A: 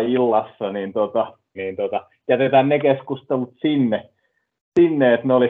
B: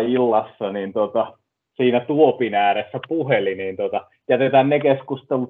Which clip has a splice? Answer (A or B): A